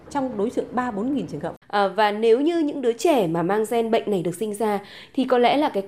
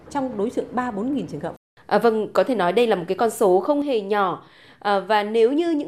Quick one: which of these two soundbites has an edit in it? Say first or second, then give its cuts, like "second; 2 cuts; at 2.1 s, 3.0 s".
first; 1 cut; at 1.6 s